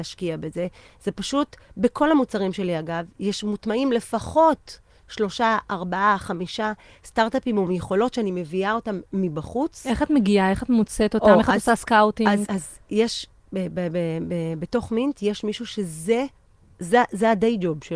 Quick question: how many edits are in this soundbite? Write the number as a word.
one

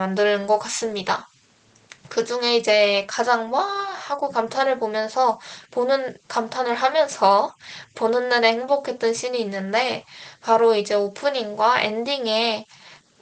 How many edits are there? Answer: one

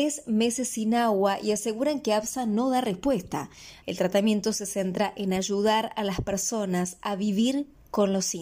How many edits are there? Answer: one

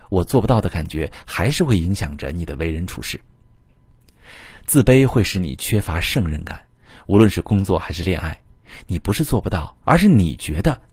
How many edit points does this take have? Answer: one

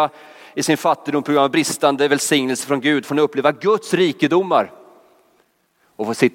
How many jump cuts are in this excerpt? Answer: zero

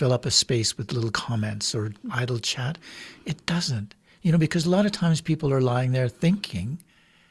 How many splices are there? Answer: one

